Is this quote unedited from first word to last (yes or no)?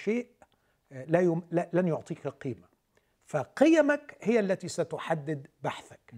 yes